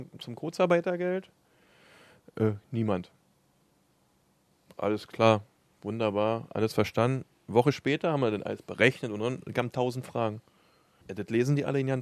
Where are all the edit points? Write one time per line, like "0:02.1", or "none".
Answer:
0:11.0

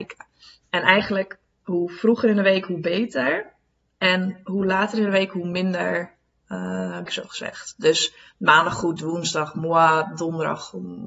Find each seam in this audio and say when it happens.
0:07.1
0:09.0

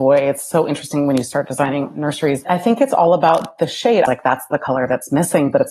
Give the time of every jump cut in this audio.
0:02.4
0:04.0

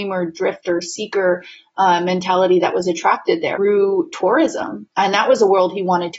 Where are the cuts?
0:03.5
0:04.9

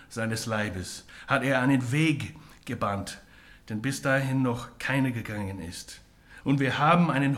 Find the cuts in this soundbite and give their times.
0:06.4

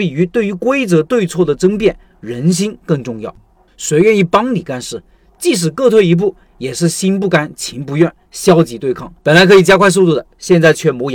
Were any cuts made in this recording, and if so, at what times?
0:03.7
0:09.2

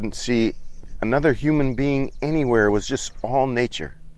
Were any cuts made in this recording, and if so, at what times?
none

